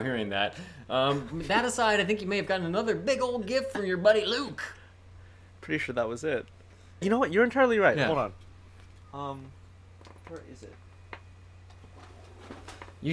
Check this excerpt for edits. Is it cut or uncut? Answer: cut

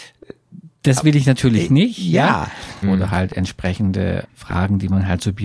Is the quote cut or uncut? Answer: cut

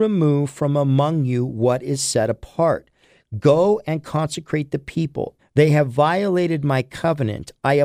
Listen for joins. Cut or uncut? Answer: cut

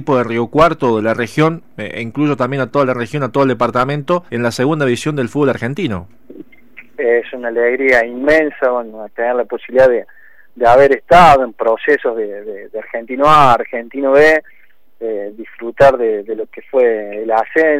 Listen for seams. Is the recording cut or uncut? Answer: cut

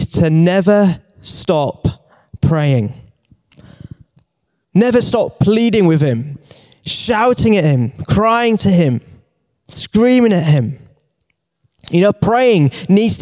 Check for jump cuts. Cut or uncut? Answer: cut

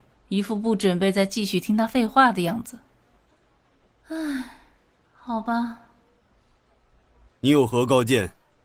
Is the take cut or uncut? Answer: cut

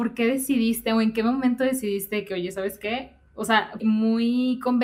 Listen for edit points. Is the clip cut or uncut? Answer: cut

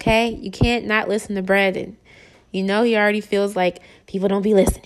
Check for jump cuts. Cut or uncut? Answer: uncut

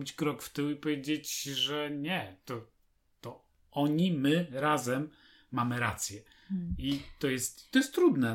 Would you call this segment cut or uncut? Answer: uncut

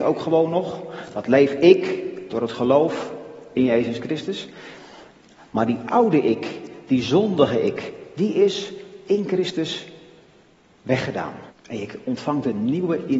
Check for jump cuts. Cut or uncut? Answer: cut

